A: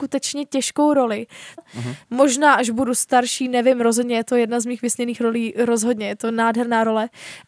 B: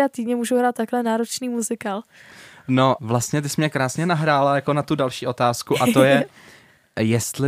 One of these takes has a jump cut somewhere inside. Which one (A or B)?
A